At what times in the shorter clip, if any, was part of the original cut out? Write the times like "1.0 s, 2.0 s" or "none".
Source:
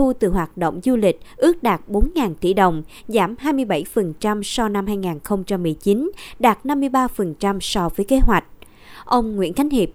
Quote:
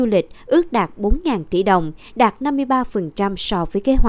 2.1 s